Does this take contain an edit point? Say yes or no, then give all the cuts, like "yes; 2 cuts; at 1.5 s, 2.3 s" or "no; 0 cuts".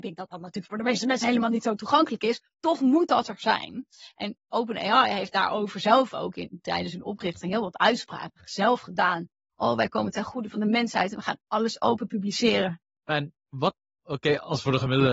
yes; 1 cut; at 13.0 s